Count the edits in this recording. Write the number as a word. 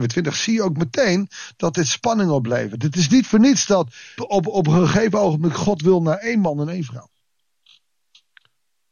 one